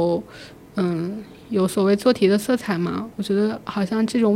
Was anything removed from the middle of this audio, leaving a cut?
no; 0 cuts

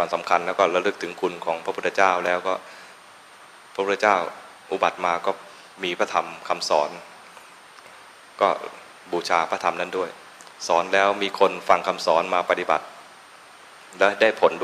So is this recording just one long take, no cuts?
no; 1 cut; at 5.7 s

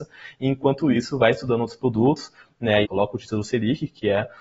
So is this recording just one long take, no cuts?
no; 1 cut; at 2.8 s

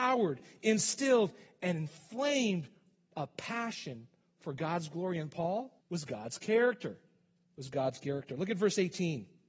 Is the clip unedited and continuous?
no; 1 cut; at 5.8 s

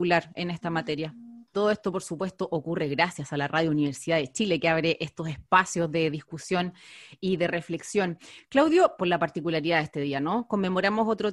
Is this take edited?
yes; 2 cuts; at 1.5 s, 9.0 s

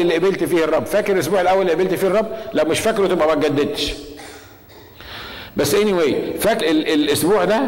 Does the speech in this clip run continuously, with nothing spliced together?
no; 1 cut; at 6.6 s

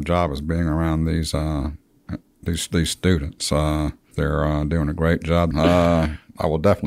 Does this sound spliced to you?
yes; 2 cuts; at 4.1 s, 5.5 s

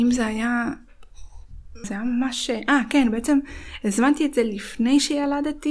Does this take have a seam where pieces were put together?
yes; 1 cut; at 1.8 s

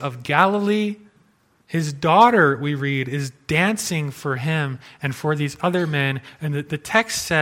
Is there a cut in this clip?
yes; 1 cut; at 1.6 s

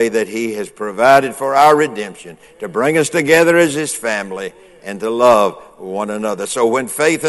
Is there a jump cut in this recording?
no; 0 cuts

